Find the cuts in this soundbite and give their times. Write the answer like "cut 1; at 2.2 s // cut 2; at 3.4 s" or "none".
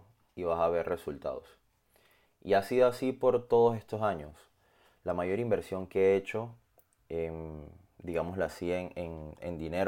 none

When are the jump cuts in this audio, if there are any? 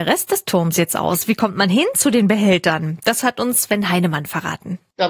none

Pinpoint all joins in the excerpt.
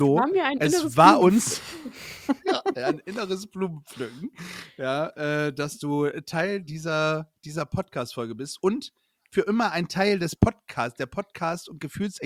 none

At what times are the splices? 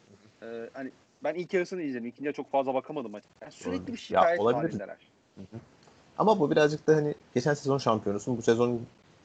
cut 1; at 3.2 s

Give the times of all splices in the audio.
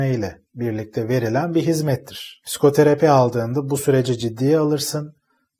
cut 1; at 2.4 s

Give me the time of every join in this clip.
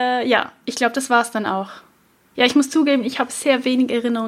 cut 1; at 2.3 s

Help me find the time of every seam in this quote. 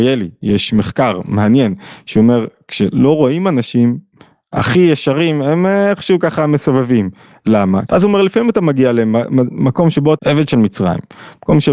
cut 1; at 7.9 s // cut 2; at 10.2 s

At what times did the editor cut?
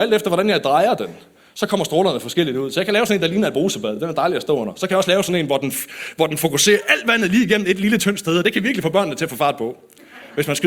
none

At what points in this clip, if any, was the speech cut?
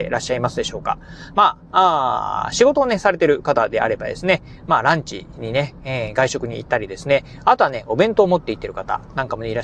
none

